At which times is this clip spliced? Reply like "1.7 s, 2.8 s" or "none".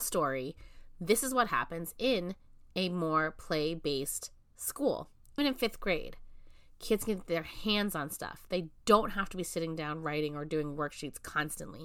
5.4 s